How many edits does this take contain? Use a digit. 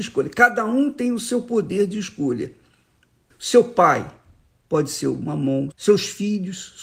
2